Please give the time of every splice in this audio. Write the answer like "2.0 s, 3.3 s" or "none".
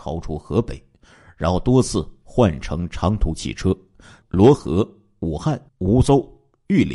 4.2 s, 5.7 s